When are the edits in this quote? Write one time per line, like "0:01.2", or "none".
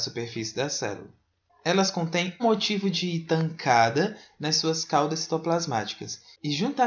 0:02.4